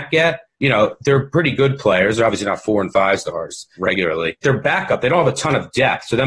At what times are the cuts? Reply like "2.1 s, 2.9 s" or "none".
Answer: 4.4 s